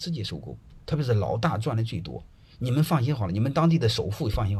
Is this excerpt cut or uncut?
uncut